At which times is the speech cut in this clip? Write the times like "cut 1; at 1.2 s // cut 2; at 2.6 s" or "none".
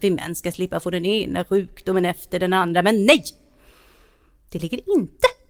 none